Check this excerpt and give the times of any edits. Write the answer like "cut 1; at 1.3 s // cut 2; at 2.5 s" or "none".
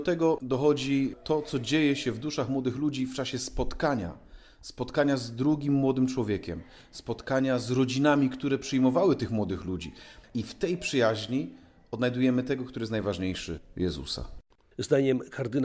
none